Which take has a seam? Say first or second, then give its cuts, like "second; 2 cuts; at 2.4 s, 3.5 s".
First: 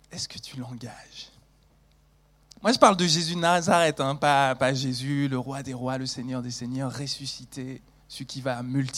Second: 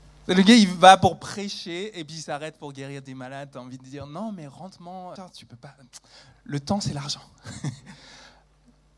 second; 1 cut; at 5.2 s